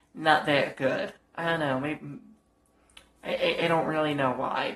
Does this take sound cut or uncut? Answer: cut